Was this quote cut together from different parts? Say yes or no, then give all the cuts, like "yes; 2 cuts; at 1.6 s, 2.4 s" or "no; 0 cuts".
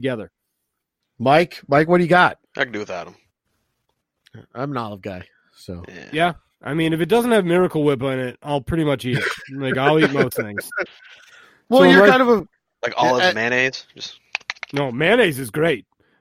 yes; 2 cuts; at 1.0 s, 2.4 s